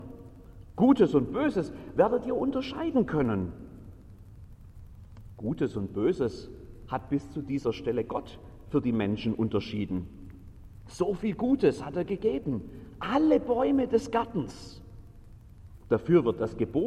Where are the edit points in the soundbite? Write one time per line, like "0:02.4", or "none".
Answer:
0:15.8